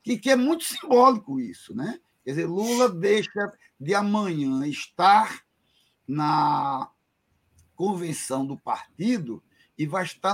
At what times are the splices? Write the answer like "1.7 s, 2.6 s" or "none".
none

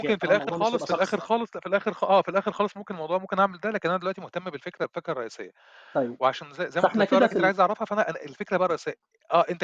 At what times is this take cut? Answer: none

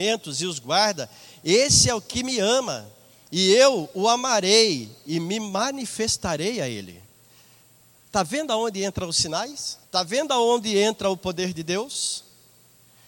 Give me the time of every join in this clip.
3.1 s, 9.8 s

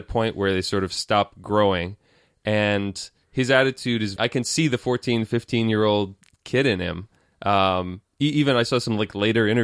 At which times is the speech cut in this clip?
4.2 s

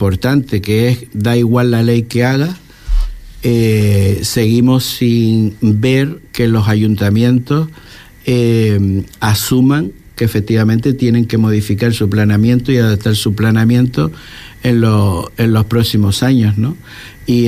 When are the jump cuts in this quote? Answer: none

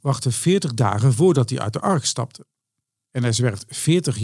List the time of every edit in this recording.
3.0 s

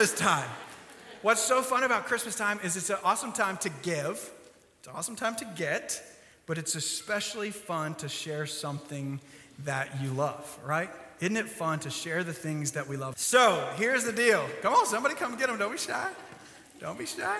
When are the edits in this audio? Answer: 13.1 s

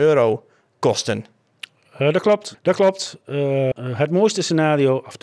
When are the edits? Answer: 2.5 s, 3.7 s

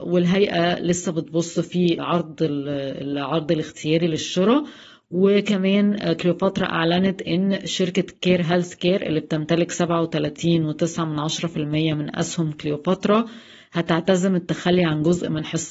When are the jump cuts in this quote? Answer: 2.0 s

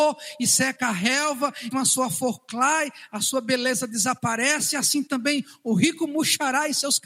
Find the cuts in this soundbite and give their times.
1.7 s

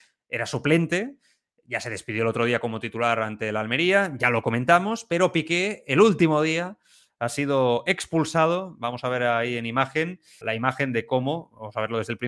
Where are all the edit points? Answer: 10.4 s

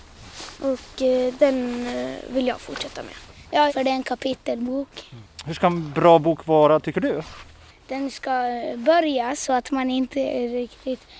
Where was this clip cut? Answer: 3.7 s

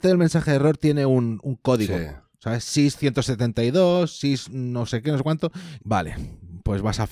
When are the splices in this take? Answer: 5.8 s

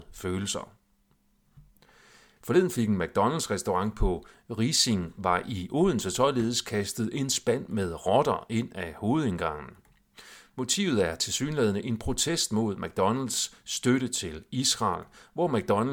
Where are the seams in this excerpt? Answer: 2.4 s

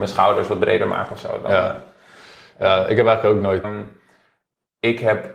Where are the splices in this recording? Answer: 3.6 s

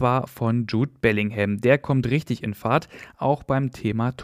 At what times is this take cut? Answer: none

